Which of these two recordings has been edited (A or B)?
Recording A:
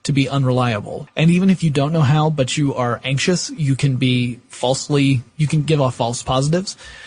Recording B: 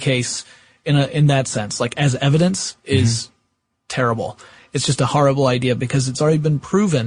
A